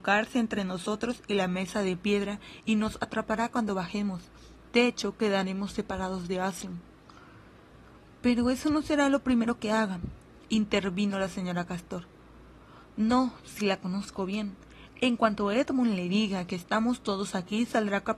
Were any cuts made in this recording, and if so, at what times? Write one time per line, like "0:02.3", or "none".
none